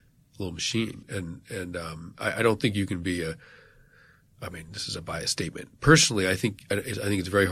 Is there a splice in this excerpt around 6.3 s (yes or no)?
no